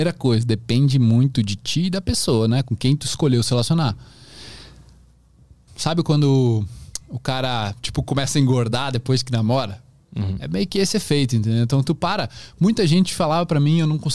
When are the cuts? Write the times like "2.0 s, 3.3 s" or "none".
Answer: 5.7 s